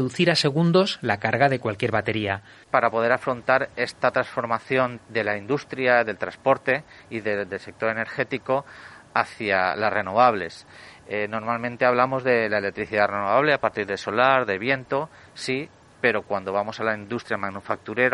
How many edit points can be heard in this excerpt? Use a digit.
2